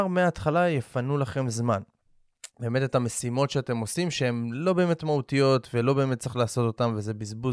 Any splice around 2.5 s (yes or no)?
yes